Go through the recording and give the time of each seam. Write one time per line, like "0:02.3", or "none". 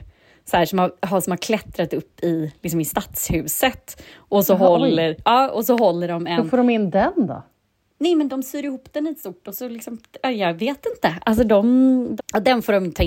0:08.3
0:12.2